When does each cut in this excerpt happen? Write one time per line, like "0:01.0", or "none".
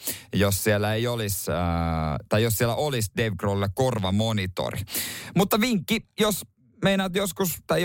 none

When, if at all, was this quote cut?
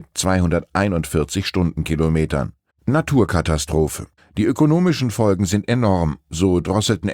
0:02.7
0:04.2

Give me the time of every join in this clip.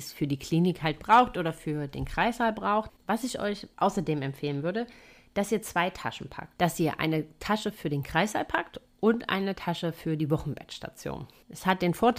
none

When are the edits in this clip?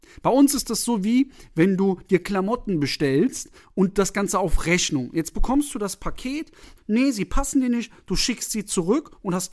0:06.8

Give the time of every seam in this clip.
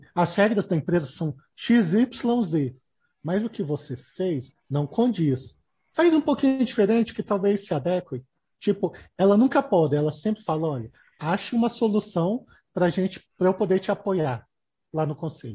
0:04.6

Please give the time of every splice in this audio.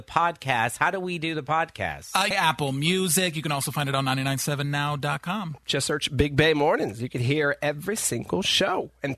0:02.3

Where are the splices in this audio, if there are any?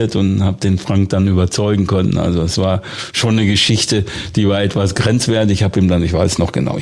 none

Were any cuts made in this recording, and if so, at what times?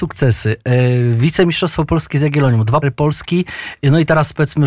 0:02.8

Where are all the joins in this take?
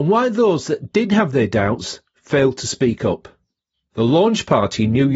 0:03.9

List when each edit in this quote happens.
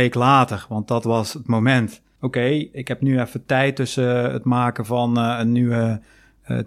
0:02.2

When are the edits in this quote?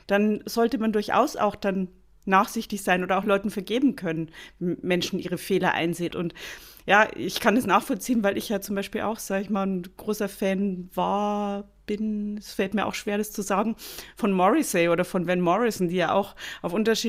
0:06.1

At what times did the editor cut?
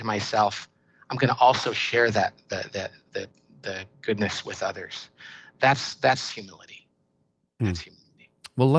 none

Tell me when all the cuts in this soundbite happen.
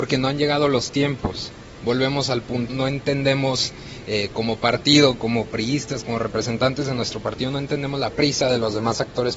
0:02.7

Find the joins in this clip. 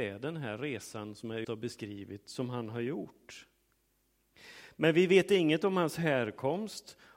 0:01.4

